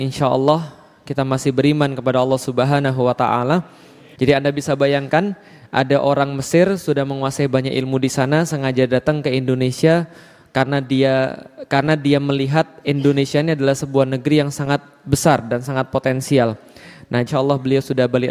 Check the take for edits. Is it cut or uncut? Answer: cut